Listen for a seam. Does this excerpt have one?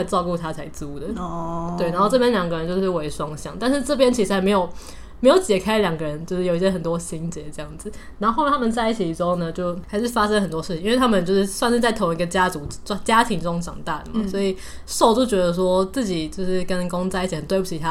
no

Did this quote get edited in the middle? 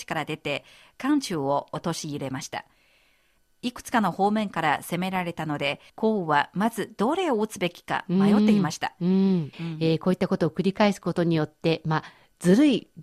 yes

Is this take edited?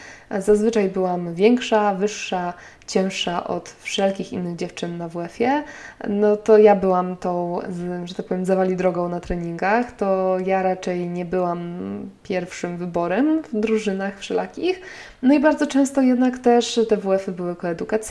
no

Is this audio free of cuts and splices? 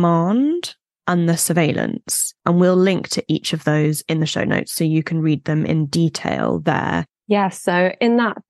no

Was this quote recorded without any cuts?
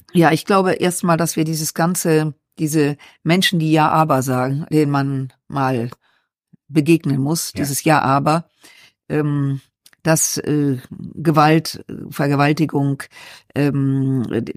yes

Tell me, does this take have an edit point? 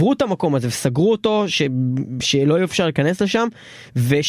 no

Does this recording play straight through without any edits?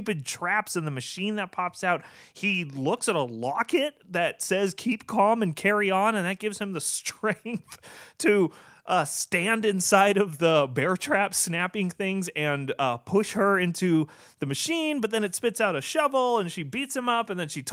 yes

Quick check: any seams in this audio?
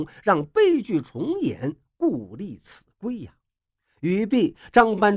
no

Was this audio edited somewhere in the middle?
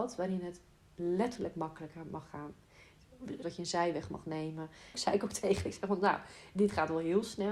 yes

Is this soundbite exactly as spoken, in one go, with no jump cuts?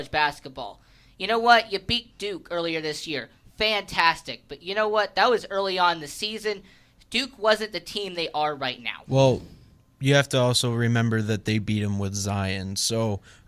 yes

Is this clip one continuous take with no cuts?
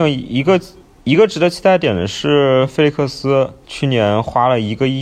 no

